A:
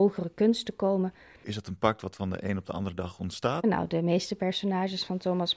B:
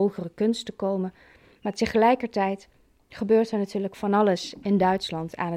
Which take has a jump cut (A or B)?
A